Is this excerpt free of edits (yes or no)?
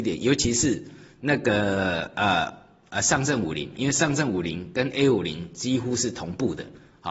yes